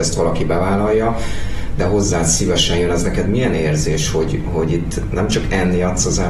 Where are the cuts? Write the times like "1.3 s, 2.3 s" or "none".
none